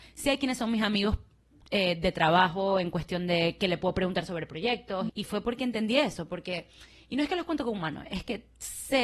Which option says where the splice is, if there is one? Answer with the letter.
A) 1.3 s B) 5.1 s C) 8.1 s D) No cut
B